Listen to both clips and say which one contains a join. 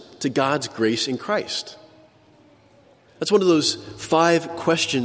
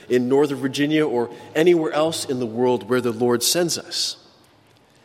first; 1 cut; at 3.1 s

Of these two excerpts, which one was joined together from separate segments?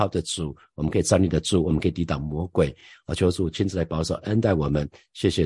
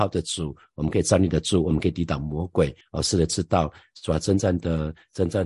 second; 1 cut; at 2.8 s

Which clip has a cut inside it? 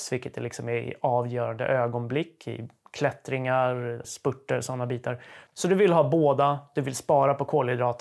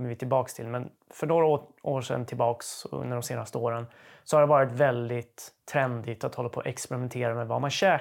first; 2 cuts; at 4.0 s, 5.5 s

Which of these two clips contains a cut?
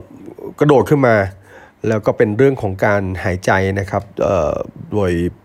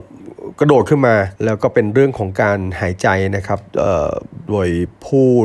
second; 1 cut; at 1.4 s

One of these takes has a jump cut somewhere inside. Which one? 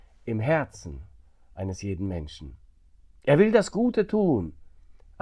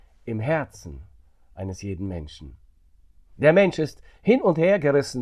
first; 1 cut; at 3.1 s

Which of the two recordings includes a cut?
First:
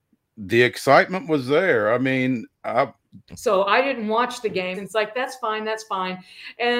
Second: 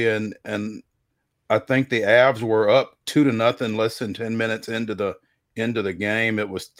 first; 2 cuts; at 3.3 s, 4.7 s

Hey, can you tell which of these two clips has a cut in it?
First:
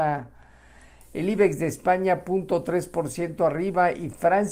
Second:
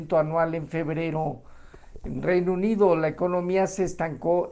first; 1 cut; at 1.0 s

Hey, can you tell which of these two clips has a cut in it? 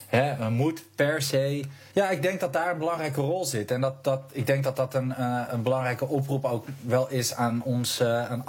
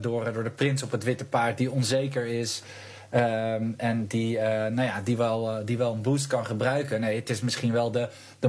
first; 2 cuts; at 1.9 s, 5.5 s

